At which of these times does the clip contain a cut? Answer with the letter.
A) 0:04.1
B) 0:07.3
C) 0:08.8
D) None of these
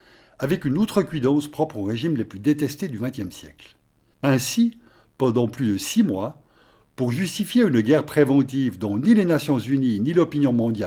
A